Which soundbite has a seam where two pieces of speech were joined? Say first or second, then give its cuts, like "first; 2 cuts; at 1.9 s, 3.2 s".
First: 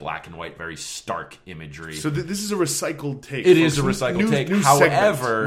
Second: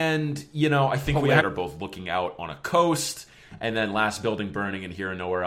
second; 1 cut; at 1.4 s